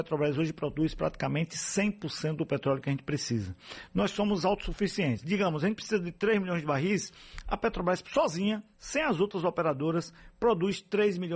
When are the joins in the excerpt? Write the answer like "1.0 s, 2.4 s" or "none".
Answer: none